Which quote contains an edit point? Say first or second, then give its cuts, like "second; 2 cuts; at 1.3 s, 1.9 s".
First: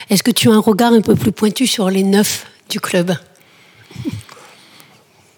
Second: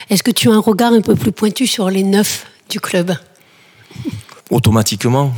second; 1 cut; at 4.4 s